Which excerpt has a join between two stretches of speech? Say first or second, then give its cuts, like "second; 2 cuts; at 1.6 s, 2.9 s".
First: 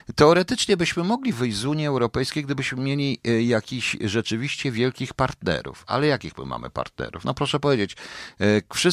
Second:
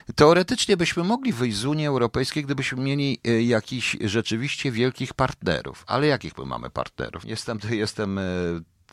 second; 1 cut; at 7.2 s